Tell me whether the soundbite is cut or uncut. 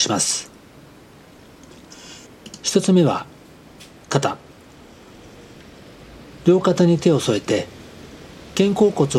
uncut